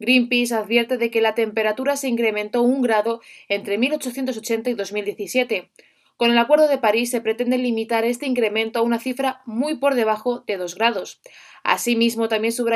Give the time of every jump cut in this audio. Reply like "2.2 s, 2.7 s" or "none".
none